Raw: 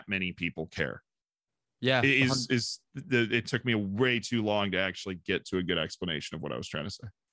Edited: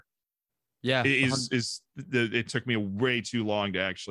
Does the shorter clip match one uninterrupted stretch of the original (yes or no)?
yes